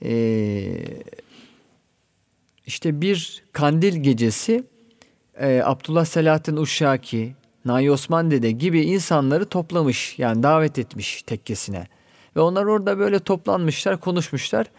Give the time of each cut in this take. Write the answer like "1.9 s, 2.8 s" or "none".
none